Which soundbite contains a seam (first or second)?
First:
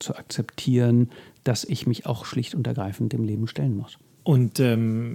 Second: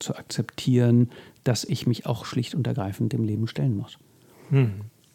first